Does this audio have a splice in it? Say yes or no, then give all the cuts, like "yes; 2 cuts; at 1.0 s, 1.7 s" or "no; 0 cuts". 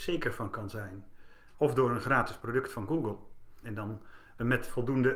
yes; 2 cuts; at 1.5 s, 3.6 s